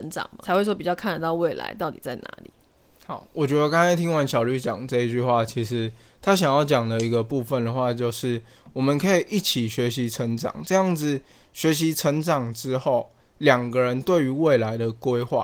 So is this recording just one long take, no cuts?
yes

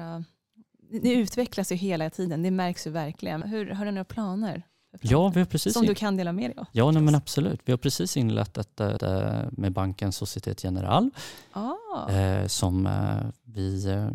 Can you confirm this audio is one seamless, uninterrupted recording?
no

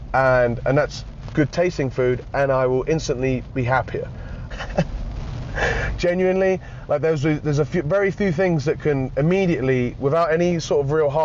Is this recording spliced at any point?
yes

